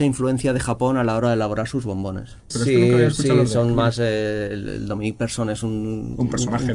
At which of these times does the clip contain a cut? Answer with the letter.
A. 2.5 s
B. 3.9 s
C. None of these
A